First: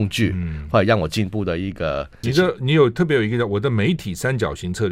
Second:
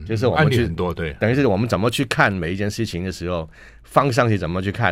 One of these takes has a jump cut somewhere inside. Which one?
first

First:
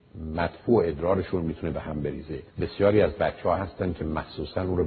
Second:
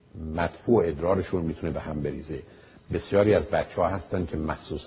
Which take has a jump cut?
first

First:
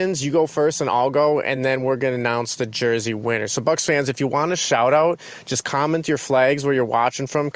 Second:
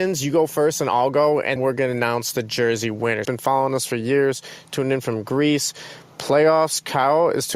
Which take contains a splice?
second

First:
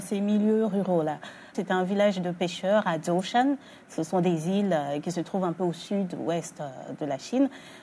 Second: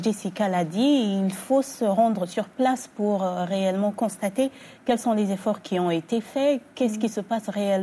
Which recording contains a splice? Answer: first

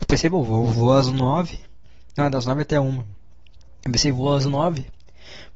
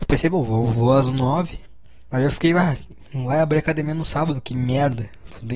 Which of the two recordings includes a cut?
second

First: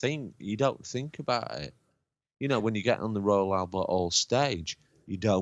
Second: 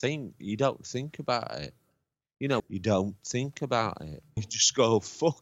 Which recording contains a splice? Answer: second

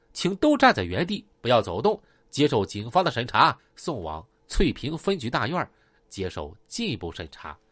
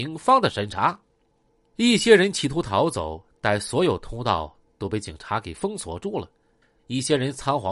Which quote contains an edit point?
first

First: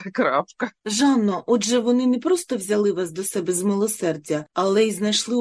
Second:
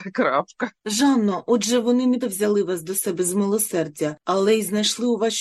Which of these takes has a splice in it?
second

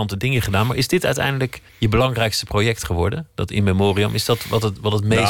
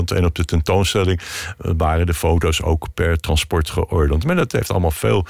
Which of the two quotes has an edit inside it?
first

